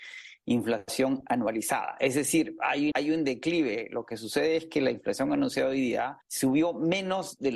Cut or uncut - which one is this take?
cut